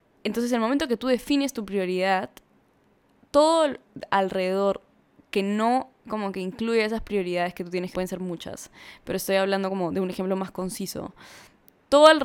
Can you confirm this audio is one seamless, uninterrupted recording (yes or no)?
no